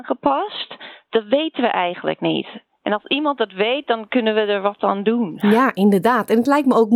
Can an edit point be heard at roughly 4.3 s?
no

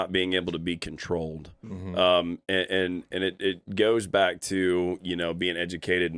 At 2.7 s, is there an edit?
no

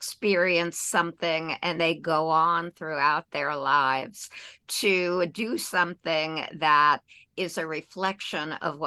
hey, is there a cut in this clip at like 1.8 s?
yes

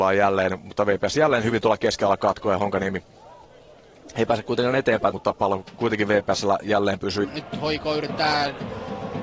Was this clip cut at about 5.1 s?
yes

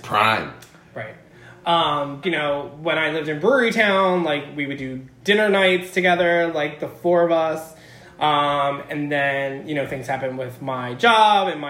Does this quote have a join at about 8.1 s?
no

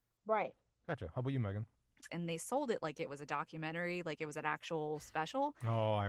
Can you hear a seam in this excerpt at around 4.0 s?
no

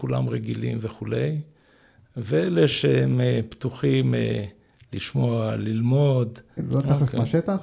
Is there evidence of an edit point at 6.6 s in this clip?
yes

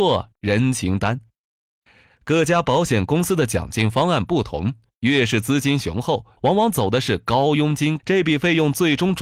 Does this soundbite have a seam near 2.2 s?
no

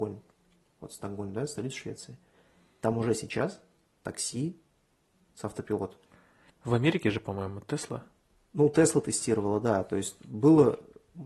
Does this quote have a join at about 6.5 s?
yes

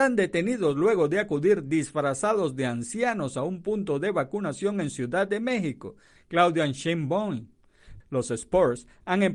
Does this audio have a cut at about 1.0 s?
no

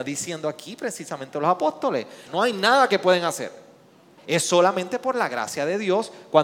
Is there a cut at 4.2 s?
yes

